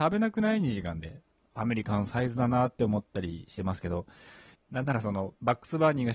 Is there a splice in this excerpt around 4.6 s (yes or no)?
yes